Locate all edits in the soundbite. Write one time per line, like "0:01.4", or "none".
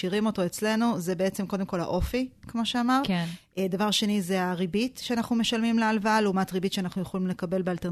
none